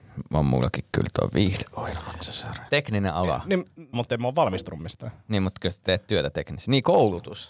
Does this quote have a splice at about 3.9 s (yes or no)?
yes